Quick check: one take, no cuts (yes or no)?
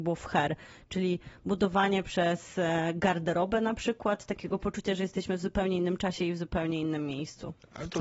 yes